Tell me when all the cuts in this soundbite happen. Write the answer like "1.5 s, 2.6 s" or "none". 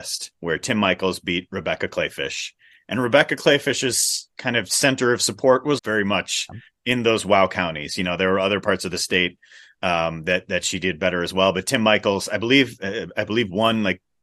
5.8 s